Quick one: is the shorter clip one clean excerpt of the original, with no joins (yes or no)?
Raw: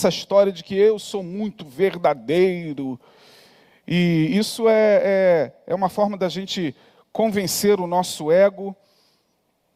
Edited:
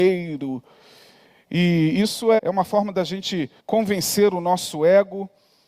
no